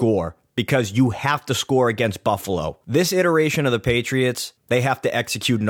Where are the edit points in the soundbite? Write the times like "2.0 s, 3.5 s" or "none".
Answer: 4.6 s